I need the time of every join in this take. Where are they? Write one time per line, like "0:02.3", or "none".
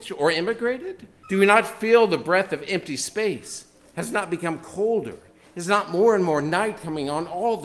0:01.2